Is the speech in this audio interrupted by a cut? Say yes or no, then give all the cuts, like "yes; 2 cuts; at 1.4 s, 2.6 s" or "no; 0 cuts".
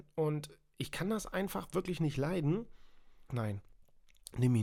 yes; 1 cut; at 3.3 s